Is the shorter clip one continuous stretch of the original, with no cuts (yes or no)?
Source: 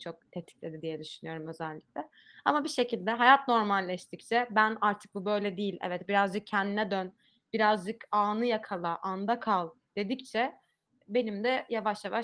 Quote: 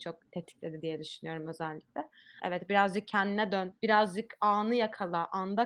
no